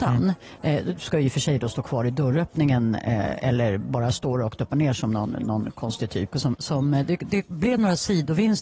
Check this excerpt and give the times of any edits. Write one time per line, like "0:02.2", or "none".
0:06.3